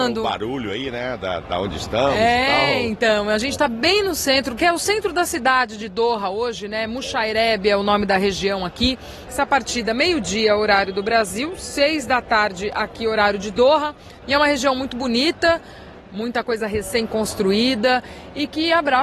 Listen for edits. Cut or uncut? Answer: cut